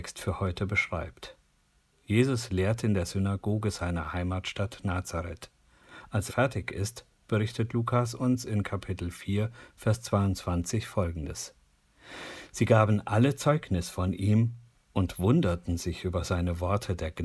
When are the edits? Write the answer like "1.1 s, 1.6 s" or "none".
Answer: 6.3 s